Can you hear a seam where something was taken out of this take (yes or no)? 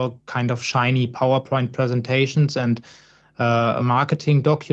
yes